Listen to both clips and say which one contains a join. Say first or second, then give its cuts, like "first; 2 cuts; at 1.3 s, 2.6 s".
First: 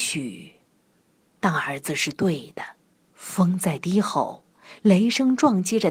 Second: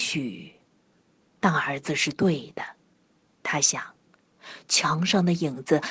first; 1 cut; at 3.0 s